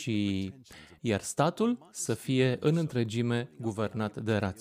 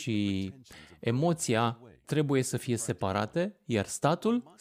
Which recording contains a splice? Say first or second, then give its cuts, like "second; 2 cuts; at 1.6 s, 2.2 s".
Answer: first; 1 cut; at 1.0 s